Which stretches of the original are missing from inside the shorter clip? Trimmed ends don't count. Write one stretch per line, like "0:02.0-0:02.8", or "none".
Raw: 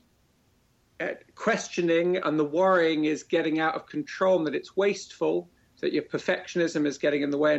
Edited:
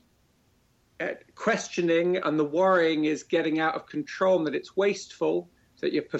none